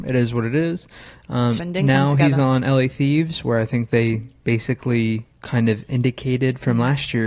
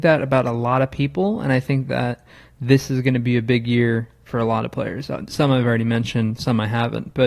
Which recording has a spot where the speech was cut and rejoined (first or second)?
first